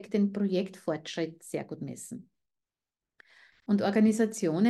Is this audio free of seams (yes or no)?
yes